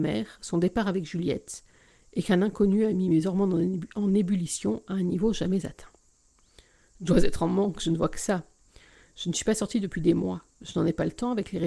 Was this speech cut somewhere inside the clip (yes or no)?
no